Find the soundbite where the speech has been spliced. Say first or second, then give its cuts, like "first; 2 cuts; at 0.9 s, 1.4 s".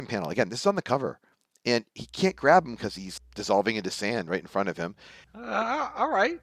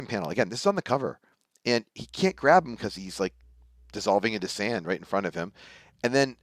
first; 2 cuts; at 3.2 s, 5.2 s